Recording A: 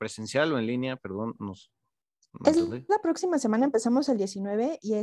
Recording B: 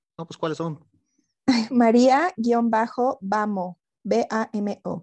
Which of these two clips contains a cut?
B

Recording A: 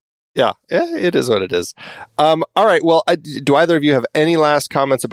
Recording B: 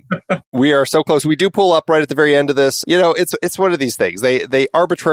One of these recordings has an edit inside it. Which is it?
B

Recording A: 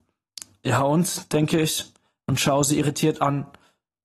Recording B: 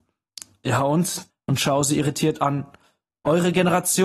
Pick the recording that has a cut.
B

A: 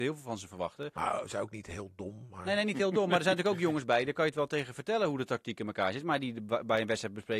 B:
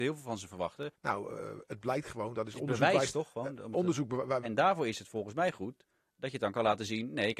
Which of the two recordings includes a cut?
B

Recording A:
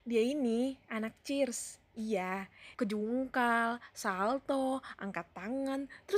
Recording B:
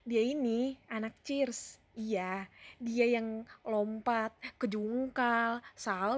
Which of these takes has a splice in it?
A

